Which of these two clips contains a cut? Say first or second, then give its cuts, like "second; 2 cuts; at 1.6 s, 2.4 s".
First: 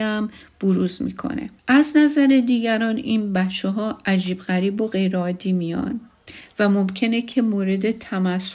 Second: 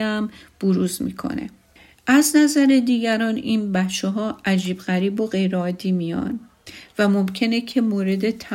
first; 1 cut; at 1.6 s